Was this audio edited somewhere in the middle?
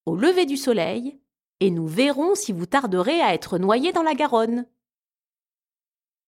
no; 0 cuts

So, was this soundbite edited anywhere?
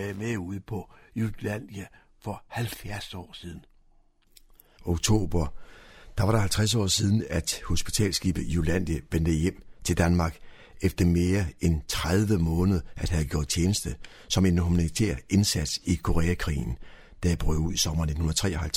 yes; 1 cut; at 4.8 s

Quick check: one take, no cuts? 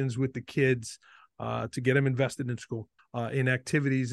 no; 1 cut; at 3.0 s

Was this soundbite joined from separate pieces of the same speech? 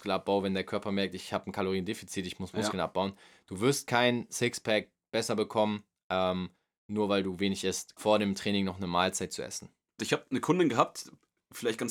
yes; 2 cuts; at 8.0 s, 10.0 s

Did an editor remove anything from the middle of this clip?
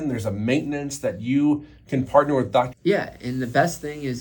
yes; 1 cut; at 2.7 s

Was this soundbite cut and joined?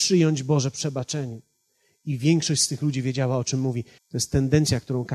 yes; 1 cut; at 4.0 s

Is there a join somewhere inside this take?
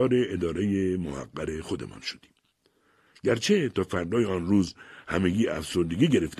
no; 0 cuts

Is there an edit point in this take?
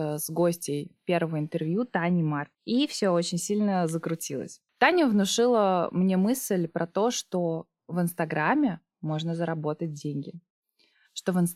yes; 2 cuts; at 2.6 s, 4.7 s

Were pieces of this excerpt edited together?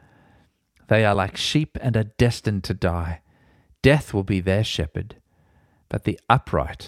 no; 0 cuts

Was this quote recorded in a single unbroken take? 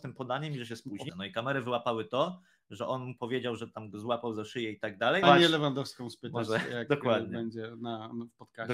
no; 2 cuts; at 1.1 s, 5.2 s

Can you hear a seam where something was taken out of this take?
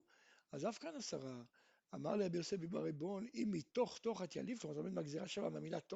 no; 0 cuts

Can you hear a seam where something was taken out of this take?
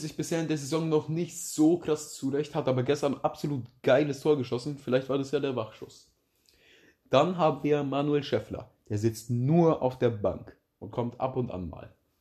no; 0 cuts

